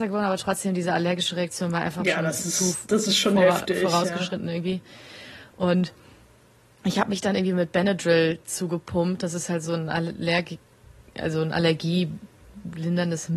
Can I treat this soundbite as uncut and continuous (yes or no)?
yes